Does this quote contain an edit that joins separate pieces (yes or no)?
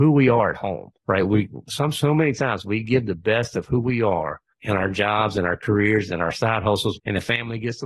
yes